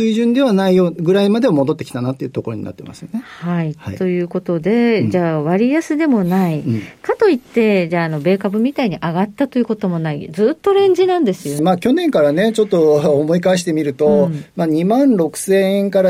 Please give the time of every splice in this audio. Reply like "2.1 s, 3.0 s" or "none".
11.6 s